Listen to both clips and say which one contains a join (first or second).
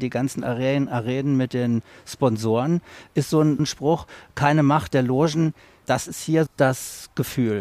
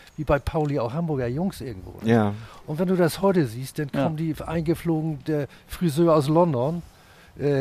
first